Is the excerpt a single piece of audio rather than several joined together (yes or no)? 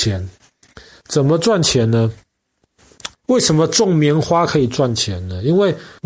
no